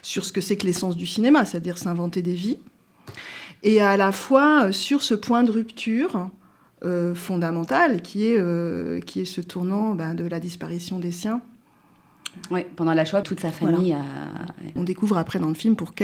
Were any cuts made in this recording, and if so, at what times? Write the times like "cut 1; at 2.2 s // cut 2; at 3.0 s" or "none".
cut 1; at 13.2 s // cut 2; at 14.8 s